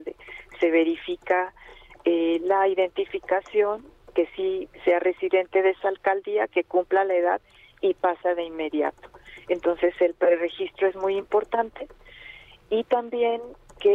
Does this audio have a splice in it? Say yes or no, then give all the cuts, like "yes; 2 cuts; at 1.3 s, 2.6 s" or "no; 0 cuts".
no; 0 cuts